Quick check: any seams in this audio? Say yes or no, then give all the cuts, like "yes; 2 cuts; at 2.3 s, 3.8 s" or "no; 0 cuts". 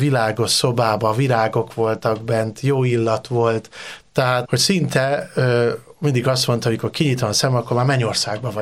yes; 1 cut; at 4.4 s